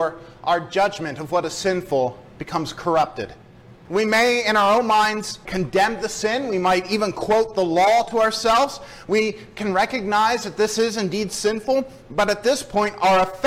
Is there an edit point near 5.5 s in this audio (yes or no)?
yes